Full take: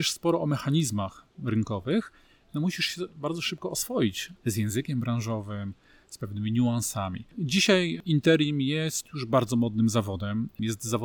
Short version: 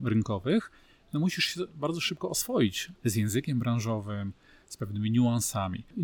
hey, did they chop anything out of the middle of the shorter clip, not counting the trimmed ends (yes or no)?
no